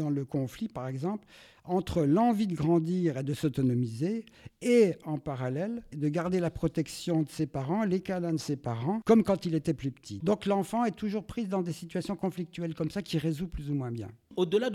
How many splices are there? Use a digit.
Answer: 2